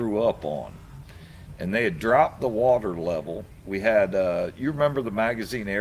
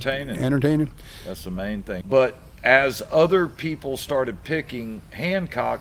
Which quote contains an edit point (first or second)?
second